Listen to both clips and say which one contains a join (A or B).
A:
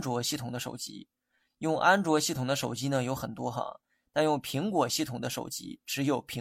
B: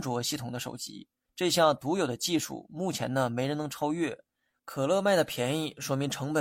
B